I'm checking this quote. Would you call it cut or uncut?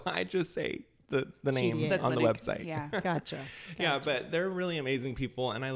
uncut